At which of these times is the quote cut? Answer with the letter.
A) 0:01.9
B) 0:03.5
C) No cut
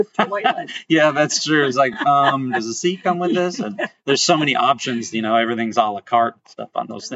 C